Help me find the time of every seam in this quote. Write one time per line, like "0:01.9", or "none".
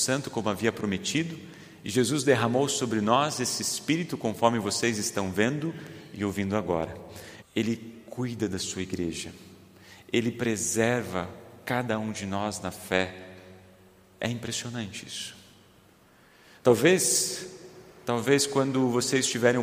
0:07.4